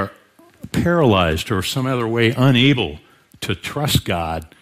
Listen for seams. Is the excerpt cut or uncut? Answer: uncut